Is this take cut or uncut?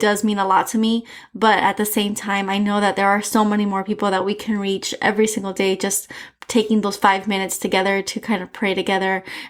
uncut